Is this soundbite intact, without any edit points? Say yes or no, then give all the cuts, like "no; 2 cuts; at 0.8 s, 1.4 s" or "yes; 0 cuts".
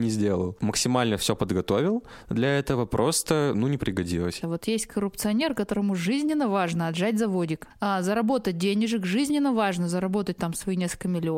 no; 2 cuts; at 4.4 s, 7.7 s